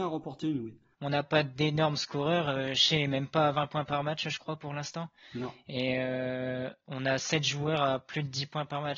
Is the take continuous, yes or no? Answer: no